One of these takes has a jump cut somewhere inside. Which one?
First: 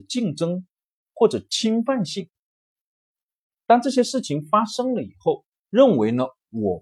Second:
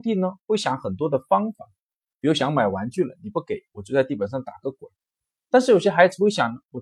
first; 1 cut; at 5.5 s

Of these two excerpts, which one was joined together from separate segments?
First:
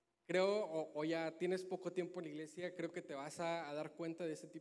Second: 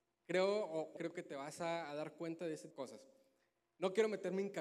second; 2 cuts; at 1.0 s, 2.7 s

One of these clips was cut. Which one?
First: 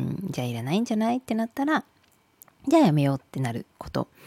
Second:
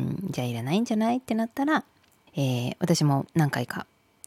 second; 1 cut; at 2.3 s

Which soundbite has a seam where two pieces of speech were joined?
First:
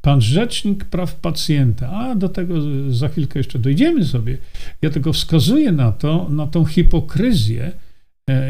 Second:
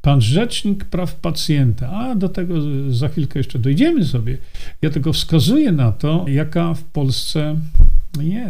second; 1 cut; at 6.3 s

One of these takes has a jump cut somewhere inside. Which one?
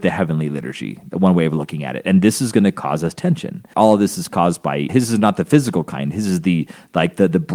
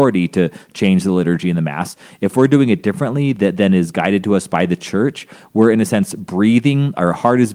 first; 2 cuts; at 3.7 s, 4.9 s

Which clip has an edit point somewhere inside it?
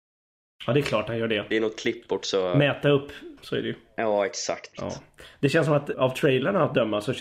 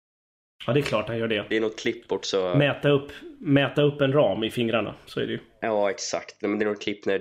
first; 3 cuts; at 3.4 s, 4.7 s, 5.9 s

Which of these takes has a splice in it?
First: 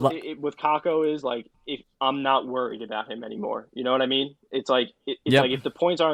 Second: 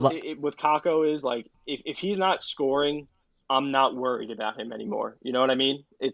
first; 1 cut; at 1.8 s

